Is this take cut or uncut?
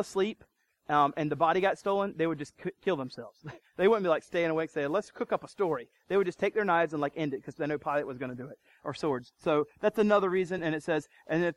uncut